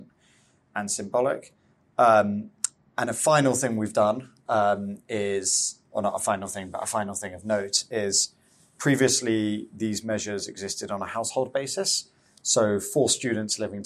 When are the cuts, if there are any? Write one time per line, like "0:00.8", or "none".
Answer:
none